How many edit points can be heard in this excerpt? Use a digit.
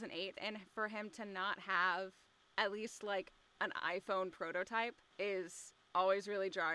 0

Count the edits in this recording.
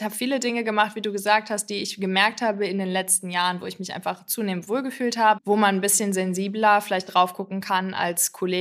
1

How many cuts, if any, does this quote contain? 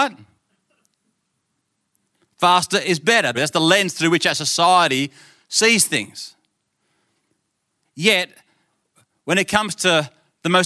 1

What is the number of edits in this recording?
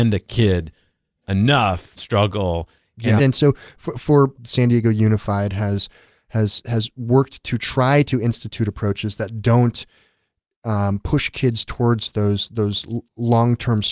3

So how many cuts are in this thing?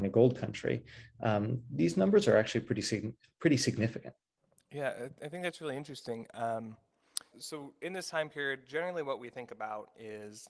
1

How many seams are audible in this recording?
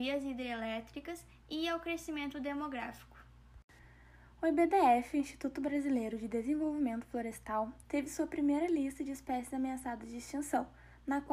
1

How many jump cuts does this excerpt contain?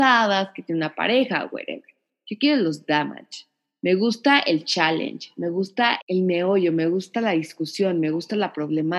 1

